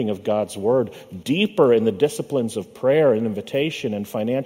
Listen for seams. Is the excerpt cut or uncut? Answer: cut